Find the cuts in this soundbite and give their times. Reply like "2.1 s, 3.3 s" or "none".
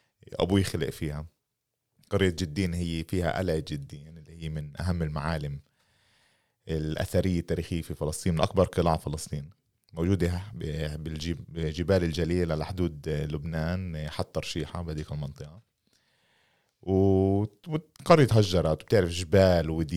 none